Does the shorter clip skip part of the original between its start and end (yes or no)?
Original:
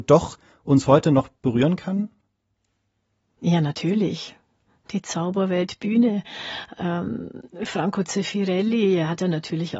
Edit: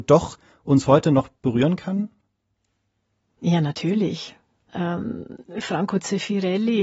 yes